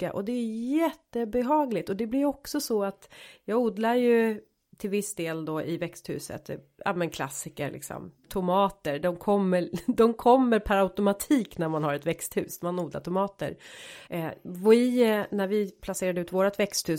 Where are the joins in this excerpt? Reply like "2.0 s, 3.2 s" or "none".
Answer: 8.2 s, 14.1 s